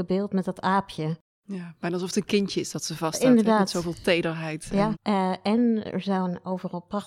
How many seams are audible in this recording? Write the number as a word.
one